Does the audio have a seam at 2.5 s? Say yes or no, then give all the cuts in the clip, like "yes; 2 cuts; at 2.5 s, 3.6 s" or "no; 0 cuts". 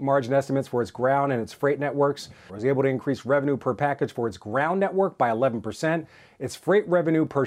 yes; 1 cut; at 2.5 s